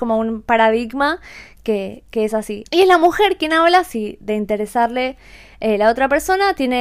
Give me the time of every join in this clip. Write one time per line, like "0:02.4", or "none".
0:02.7